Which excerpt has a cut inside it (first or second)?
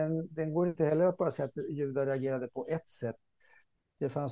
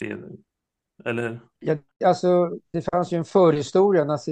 second